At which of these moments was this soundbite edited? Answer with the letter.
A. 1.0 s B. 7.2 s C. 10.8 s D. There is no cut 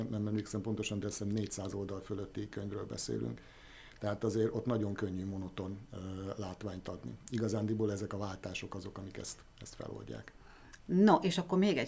C